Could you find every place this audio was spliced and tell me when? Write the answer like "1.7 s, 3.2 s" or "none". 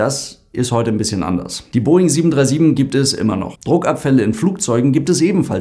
3.5 s